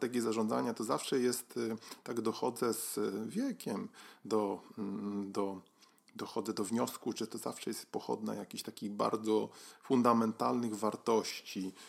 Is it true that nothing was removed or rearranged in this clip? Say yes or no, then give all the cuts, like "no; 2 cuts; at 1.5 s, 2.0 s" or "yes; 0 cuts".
yes; 0 cuts